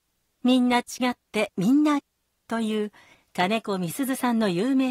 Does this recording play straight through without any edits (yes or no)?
no